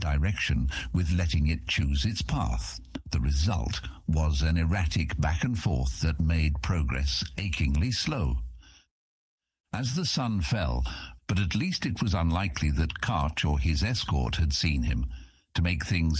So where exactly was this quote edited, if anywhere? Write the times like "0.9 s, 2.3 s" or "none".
11.2 s

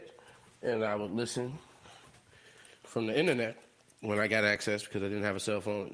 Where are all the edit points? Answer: 2.8 s

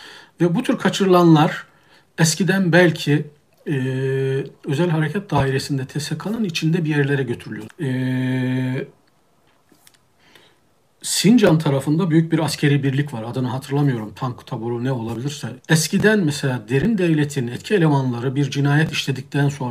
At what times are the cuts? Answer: 7.7 s, 15.6 s

